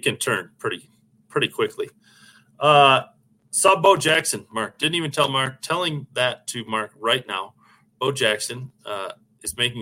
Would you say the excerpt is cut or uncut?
uncut